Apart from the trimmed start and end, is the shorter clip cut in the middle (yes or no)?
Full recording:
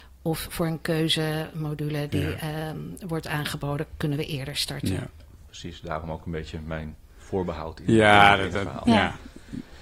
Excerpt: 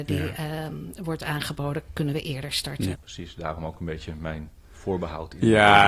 yes